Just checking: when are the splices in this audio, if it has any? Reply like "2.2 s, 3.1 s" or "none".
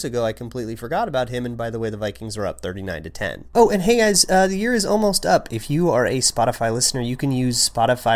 none